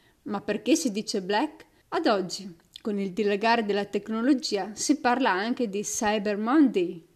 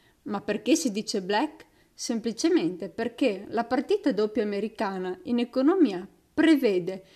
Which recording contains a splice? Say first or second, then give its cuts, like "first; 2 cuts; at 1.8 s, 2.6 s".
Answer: first; 1 cut; at 1.8 s